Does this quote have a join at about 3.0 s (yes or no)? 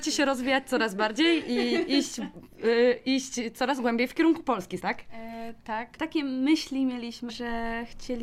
no